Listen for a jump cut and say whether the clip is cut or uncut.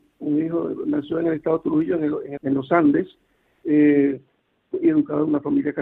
cut